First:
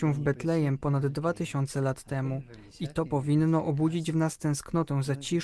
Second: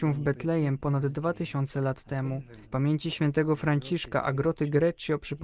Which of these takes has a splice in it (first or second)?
second